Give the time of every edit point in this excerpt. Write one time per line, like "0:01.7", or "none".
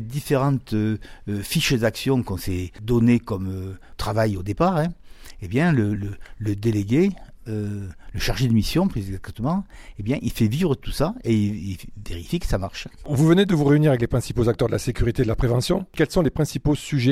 none